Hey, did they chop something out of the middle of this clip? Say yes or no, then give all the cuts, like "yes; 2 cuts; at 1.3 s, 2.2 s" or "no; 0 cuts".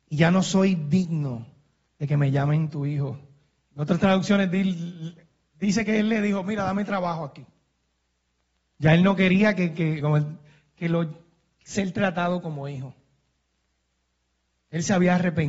no; 0 cuts